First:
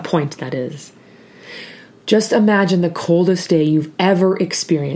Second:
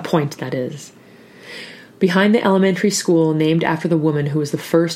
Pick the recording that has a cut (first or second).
first